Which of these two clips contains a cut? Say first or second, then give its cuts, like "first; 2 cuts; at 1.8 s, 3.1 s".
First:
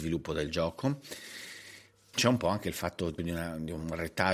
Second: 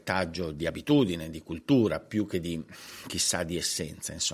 first; 2 cuts; at 2.1 s, 3.2 s